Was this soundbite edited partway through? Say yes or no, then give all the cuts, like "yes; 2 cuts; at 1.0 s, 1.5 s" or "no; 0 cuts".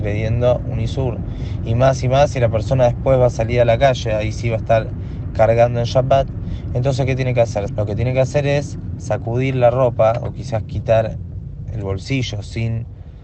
yes; 1 cut; at 7.7 s